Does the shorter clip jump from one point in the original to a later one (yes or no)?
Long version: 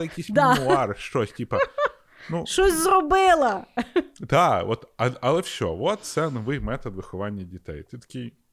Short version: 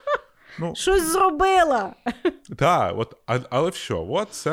no